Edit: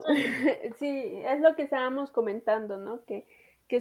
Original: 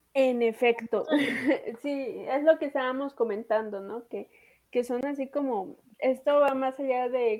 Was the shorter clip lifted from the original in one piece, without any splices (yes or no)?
yes